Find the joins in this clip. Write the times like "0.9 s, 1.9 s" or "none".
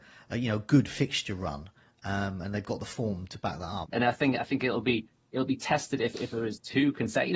3.8 s, 6.1 s

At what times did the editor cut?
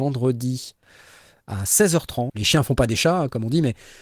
2.3 s

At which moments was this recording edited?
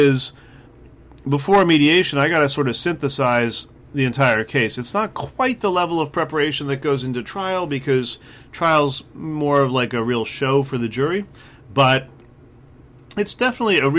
none

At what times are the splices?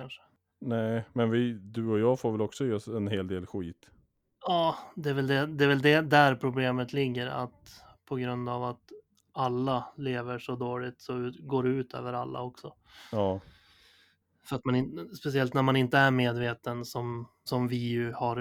17.5 s

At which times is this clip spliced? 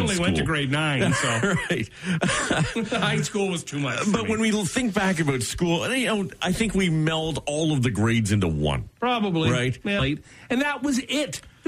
10.0 s

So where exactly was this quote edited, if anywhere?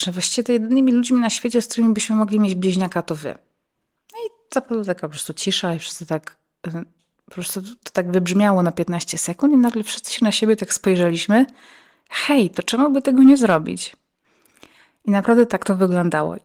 none

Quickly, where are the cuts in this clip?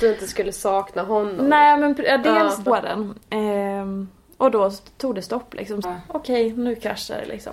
2.7 s, 5.8 s

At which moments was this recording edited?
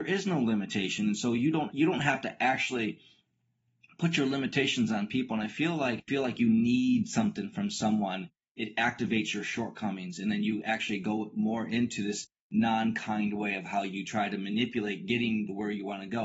none

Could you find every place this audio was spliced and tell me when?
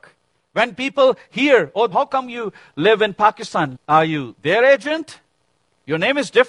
1.9 s, 3.8 s

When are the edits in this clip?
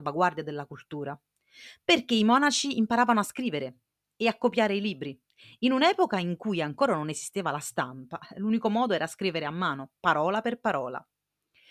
none

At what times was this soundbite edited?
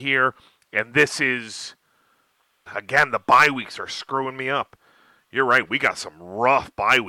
2.7 s

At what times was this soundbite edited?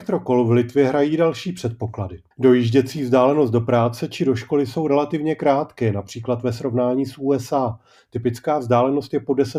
2.3 s

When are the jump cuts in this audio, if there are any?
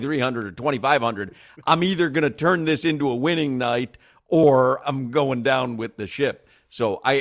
4.8 s

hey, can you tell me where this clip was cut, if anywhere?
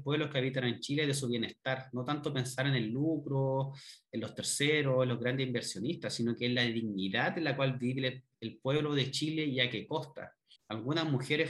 10.6 s

